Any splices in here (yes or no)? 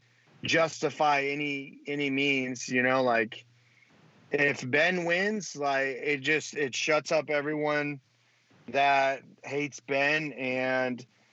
no